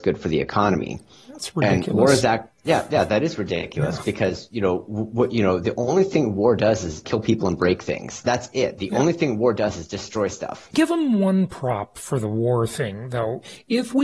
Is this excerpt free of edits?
yes; 0 cuts

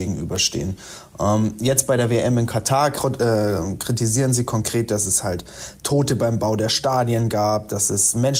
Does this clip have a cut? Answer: no; 0 cuts

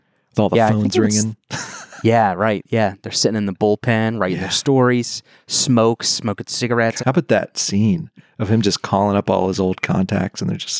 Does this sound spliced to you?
yes; 1 cut; at 7.0 s

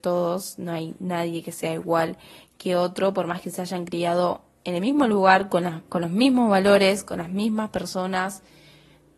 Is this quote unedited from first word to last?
yes; 0 cuts

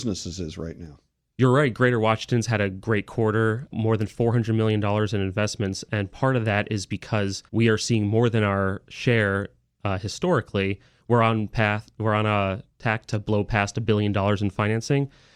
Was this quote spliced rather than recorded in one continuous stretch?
yes; 2 cuts; at 3.7 s, 7.5 s

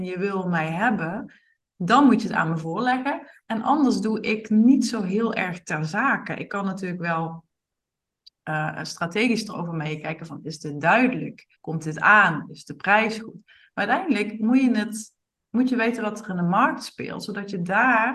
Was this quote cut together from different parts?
yes; 1 cut; at 11.6 s

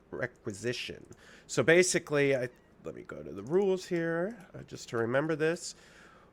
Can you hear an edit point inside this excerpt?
no; 0 cuts

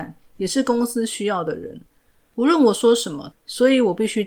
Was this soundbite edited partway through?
yes; 1 cut; at 3.3 s

